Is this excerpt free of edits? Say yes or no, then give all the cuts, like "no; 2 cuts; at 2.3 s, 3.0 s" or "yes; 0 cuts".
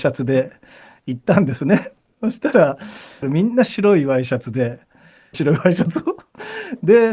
no; 2 cuts; at 3.2 s, 5.3 s